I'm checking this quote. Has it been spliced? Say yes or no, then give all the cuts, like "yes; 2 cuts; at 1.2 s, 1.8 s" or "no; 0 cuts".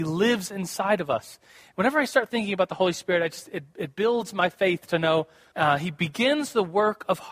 yes; 1 cut; at 5.5 s